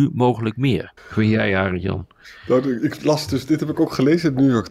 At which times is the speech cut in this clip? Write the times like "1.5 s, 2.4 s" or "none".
1.0 s